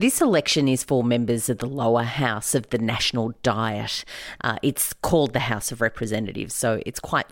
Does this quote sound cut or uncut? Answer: cut